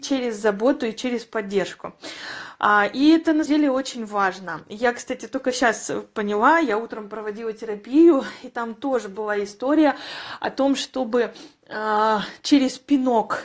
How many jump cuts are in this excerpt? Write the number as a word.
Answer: one